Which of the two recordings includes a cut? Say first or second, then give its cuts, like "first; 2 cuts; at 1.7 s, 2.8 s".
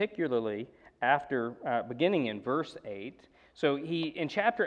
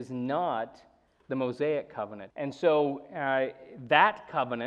second; 1 cut; at 2.3 s